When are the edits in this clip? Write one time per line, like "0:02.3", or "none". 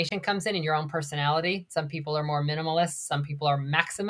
none